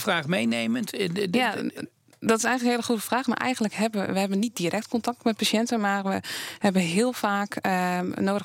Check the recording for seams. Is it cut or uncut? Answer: uncut